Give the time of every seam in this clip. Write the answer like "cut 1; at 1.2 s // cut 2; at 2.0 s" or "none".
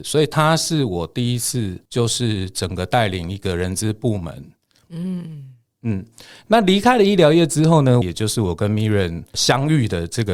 cut 1; at 4.8 s // cut 2; at 8.0 s